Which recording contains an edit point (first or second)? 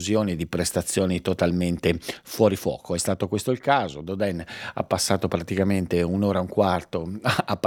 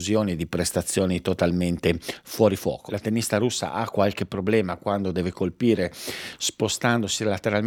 second